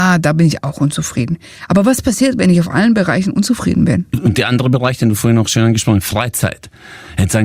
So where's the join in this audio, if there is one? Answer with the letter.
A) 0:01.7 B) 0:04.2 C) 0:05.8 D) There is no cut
D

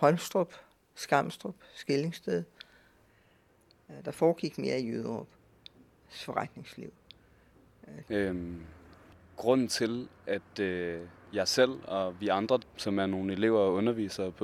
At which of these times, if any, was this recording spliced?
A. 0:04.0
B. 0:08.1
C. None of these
B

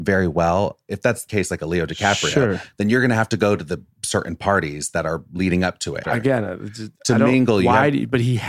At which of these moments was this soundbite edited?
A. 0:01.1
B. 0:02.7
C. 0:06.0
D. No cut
C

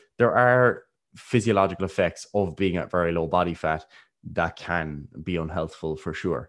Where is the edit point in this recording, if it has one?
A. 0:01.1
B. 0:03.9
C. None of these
A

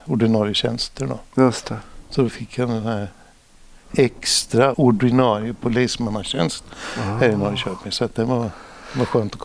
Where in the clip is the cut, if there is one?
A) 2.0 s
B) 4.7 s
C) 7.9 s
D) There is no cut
B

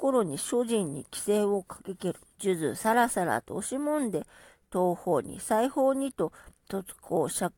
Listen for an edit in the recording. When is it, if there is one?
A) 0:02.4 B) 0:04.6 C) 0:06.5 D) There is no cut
A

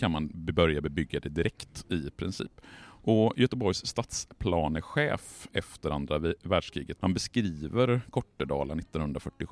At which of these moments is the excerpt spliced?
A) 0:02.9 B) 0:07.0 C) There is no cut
B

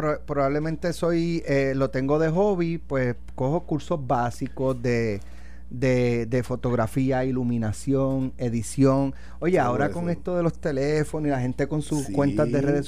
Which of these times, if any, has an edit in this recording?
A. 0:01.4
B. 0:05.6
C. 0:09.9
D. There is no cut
D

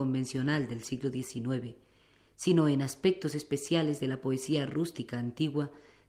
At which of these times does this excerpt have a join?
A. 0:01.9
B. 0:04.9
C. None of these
C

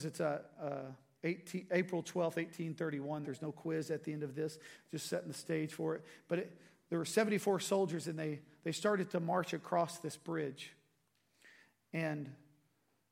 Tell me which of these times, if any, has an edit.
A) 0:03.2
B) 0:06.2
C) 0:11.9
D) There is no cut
A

